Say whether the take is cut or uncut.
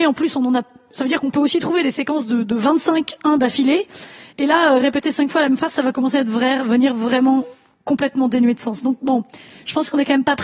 uncut